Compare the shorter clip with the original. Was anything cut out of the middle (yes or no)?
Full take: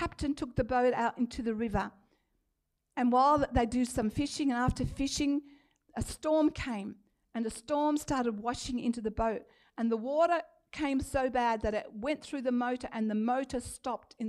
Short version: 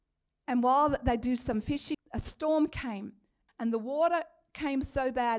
yes